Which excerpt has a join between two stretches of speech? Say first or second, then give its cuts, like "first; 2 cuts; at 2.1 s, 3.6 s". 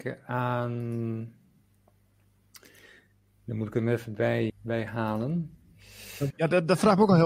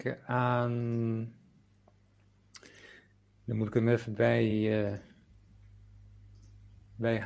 first; 2 cuts; at 4.5 s, 6.3 s